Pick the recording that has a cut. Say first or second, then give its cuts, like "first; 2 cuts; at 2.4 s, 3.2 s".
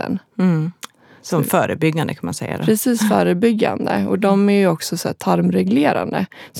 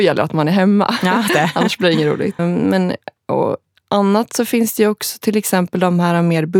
second; 2 cuts; at 1.3 s, 2.4 s